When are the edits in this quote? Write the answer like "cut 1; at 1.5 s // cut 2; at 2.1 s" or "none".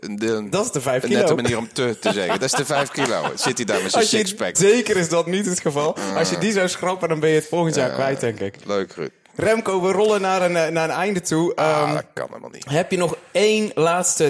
cut 1; at 4.5 s